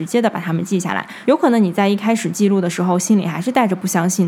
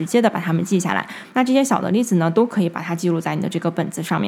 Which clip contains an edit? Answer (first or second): second